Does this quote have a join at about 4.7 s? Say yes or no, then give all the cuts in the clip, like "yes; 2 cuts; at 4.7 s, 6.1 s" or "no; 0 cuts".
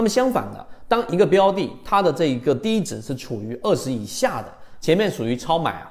yes; 1 cut; at 4.7 s